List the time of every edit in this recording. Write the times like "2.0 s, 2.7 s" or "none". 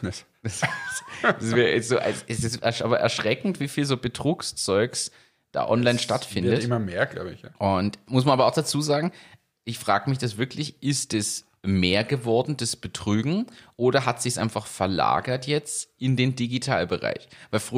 7.6 s